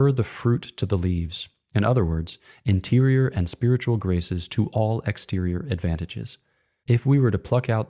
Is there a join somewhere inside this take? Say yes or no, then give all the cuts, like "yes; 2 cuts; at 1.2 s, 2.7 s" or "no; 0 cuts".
yes; 1 cut; at 6.8 s